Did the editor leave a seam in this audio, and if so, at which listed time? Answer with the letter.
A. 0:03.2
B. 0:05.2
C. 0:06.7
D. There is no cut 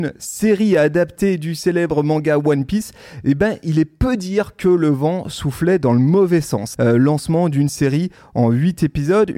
C